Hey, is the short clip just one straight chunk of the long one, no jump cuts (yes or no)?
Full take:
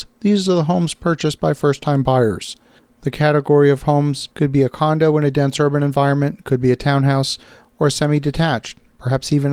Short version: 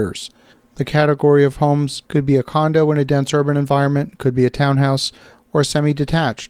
yes